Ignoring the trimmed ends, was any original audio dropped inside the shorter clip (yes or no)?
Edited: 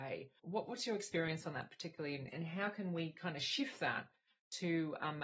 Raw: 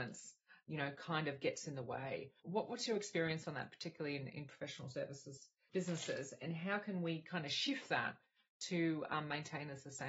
yes